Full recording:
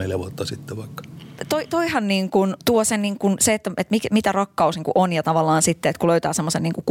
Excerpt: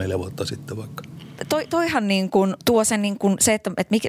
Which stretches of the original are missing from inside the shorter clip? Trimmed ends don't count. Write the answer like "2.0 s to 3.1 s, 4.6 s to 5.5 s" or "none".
none